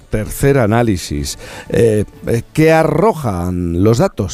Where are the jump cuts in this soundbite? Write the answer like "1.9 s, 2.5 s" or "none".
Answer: none